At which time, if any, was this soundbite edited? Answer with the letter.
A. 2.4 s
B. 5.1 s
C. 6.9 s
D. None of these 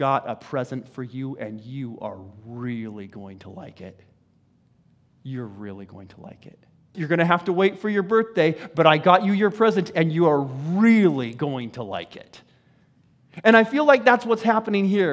C